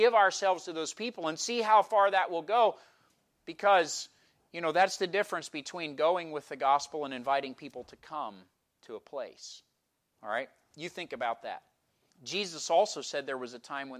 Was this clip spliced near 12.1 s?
yes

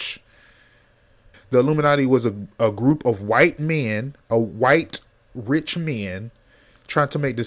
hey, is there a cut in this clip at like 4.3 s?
no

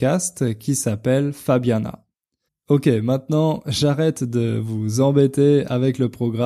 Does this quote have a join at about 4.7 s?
no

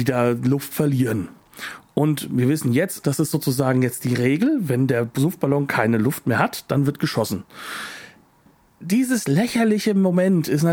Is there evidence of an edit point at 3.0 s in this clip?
yes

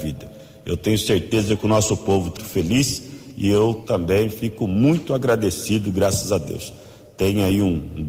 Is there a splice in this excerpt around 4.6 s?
no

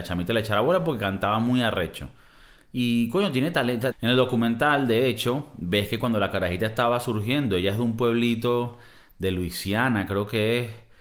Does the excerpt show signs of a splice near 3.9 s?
yes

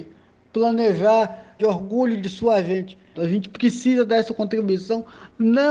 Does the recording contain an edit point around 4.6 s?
no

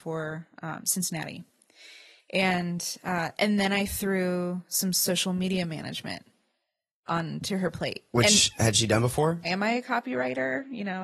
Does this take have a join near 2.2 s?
yes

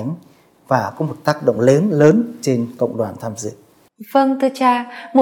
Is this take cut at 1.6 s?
no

